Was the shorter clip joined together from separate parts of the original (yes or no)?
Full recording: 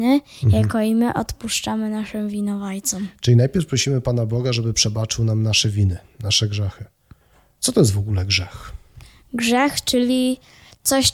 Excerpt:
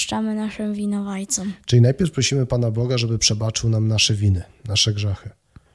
no